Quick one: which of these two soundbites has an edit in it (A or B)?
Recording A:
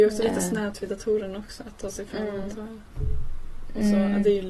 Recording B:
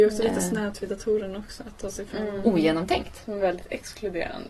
B